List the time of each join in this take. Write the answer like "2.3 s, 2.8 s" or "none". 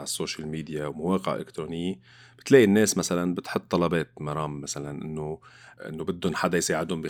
none